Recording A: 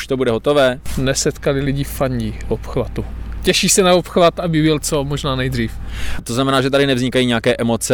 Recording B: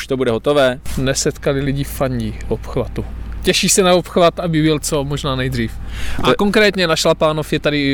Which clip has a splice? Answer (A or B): A